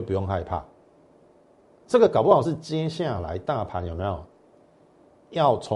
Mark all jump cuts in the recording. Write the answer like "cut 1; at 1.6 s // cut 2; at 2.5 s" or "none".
none